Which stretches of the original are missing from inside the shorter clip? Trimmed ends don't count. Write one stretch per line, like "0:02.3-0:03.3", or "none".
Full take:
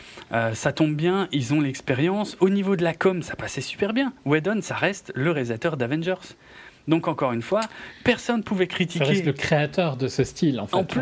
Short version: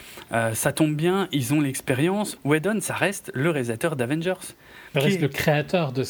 0:02.4-0:04.2
0:06.8-0:09.0